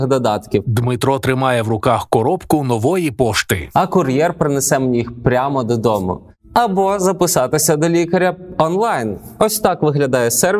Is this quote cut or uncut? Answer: uncut